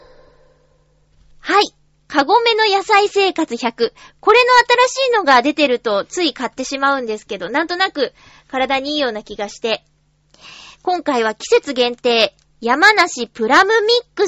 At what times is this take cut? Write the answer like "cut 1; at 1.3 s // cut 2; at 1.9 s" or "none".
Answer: none